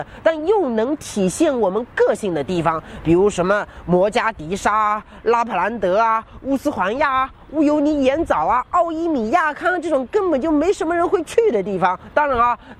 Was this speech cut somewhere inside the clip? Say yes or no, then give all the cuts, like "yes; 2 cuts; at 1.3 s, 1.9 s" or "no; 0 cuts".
no; 0 cuts